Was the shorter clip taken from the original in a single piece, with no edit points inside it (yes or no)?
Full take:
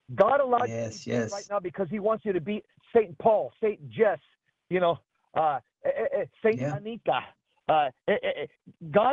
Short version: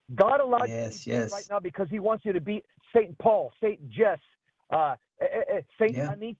no